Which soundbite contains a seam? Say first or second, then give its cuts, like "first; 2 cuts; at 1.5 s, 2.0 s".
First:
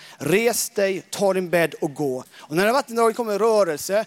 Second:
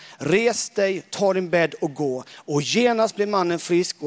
first; 1 cut; at 2.2 s